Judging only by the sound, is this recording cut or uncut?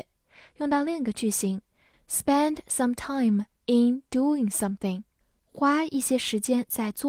uncut